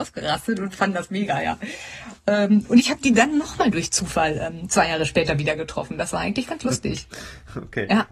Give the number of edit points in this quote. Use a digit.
0